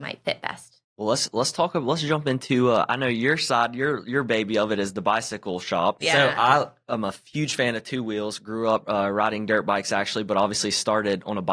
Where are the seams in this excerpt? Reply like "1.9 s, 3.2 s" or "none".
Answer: 6.0 s